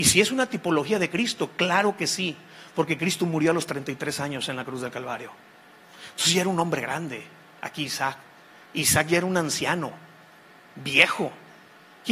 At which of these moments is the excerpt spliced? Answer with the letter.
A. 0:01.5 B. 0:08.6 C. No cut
C